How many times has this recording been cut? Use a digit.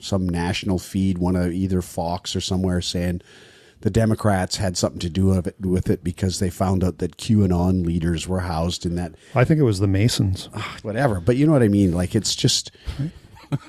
1